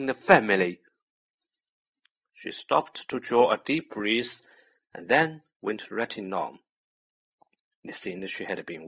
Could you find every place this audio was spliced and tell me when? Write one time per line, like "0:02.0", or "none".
none